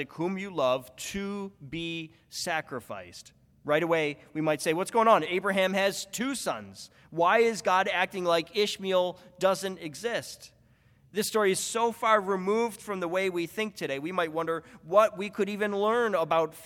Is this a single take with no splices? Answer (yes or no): yes